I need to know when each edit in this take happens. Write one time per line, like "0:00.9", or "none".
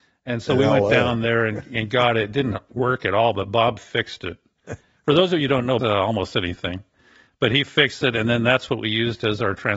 0:05.8

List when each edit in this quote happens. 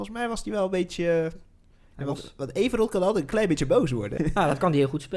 0:04.2

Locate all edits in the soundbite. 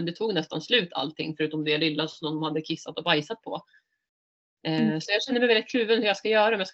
none

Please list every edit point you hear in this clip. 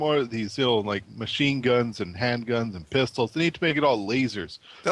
none

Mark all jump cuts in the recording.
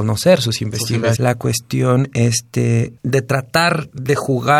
0:01.2
0:03.0

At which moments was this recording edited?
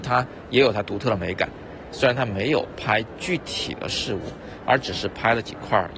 none

